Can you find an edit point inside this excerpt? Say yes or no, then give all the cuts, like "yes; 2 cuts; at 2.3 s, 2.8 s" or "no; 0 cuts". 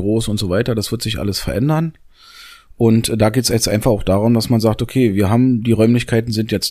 no; 0 cuts